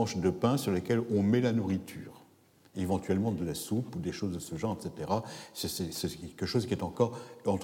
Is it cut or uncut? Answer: uncut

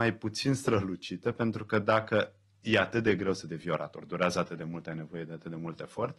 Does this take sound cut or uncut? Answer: uncut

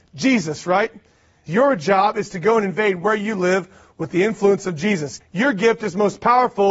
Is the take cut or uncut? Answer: cut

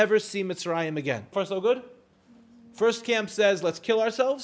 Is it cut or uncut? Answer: cut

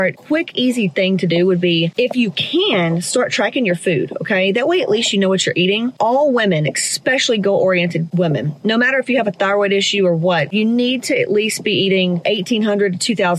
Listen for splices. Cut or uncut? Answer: uncut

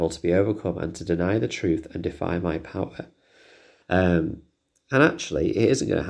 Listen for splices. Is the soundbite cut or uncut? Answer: cut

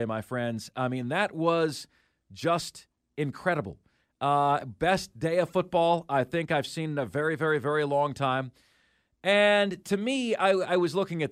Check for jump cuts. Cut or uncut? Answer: uncut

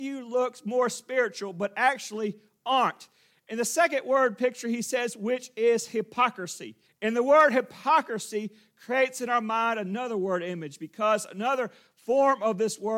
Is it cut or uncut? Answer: cut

